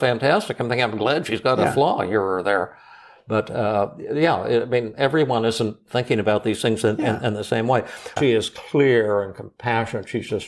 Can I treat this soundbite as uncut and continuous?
no; 1 cut; at 8.2 s

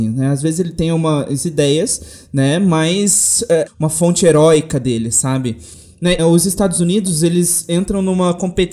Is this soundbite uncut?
no; 2 cuts; at 3.7 s, 6.2 s

